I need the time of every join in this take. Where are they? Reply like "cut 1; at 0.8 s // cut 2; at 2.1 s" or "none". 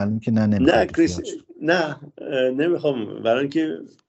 none